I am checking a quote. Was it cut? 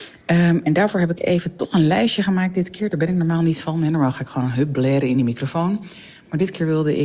no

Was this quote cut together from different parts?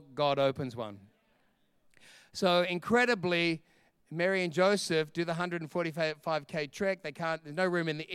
no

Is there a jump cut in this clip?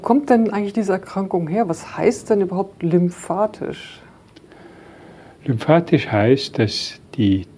no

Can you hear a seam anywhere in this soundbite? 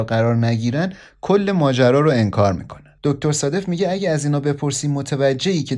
yes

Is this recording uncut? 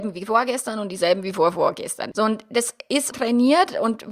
no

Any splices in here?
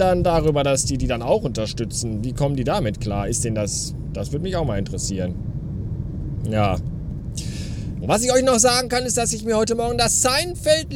yes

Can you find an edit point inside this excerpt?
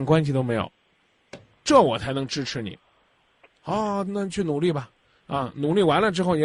no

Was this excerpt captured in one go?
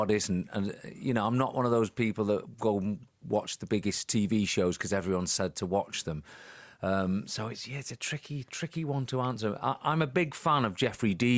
yes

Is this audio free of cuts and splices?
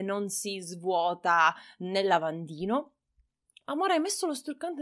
yes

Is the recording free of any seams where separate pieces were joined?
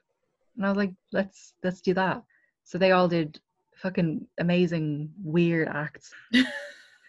no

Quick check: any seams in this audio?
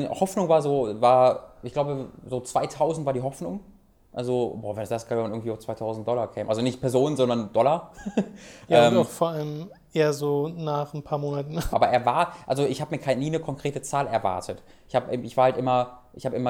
yes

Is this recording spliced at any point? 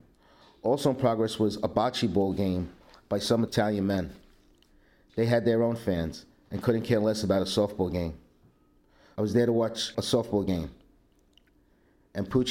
yes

